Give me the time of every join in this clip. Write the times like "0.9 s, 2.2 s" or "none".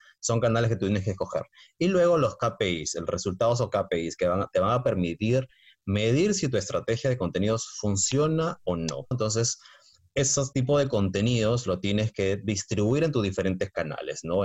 9.1 s